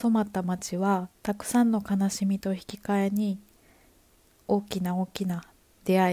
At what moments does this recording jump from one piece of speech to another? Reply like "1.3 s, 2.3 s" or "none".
1.2 s